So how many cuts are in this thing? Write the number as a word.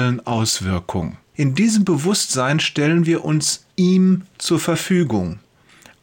two